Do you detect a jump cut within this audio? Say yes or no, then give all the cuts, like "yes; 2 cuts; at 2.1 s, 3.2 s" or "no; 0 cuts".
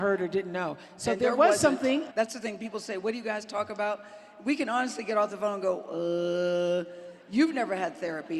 yes; 1 cut; at 2.1 s